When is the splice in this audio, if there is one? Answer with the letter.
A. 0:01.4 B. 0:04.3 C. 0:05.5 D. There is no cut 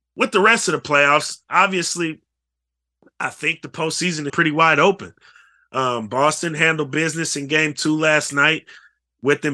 B